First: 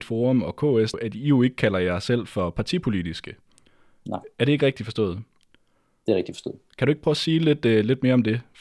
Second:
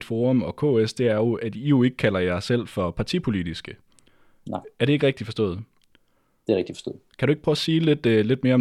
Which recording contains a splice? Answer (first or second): first